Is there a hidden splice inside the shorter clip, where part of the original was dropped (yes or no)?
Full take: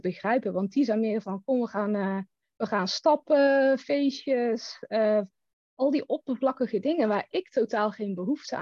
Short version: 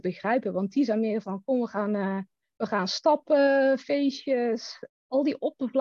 yes